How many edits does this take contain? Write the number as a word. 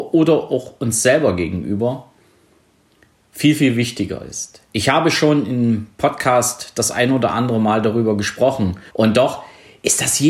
one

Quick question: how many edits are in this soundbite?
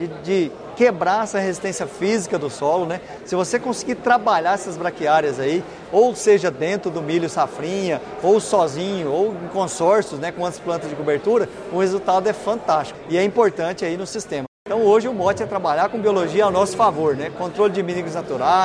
one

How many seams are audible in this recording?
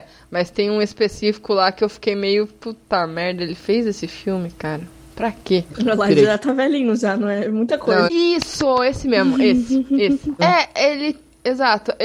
three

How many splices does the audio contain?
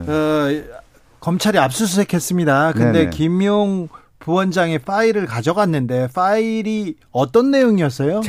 zero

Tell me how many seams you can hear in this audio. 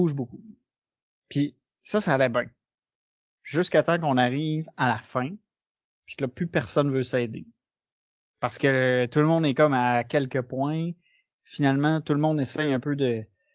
one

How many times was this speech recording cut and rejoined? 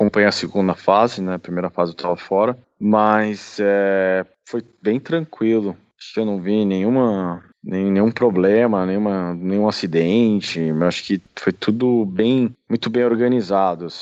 zero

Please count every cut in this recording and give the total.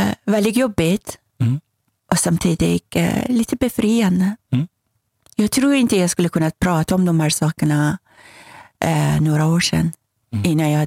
zero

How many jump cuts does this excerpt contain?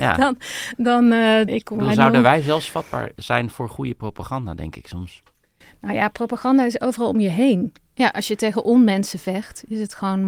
two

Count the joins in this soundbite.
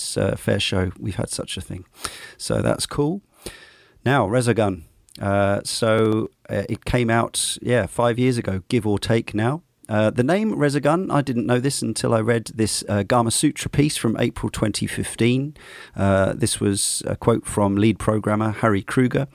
zero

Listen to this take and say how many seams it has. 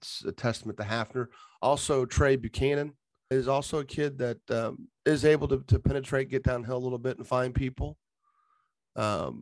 two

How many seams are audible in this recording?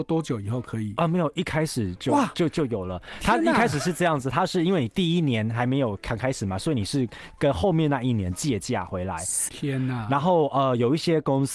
one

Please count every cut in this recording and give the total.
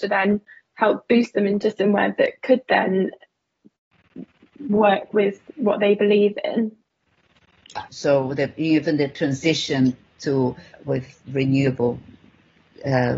two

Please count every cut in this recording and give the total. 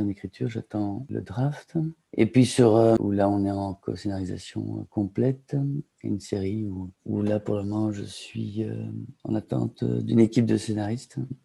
one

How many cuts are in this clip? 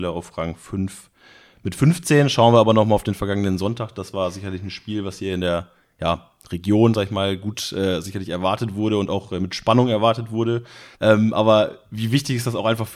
one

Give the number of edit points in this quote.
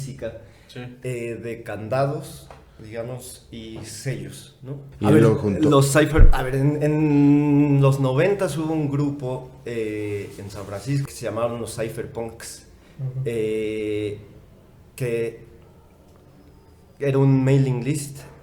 two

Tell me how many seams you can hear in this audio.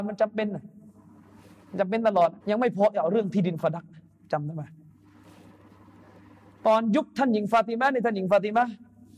one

